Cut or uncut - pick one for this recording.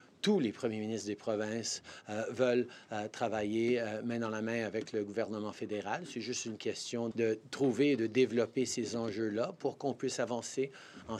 cut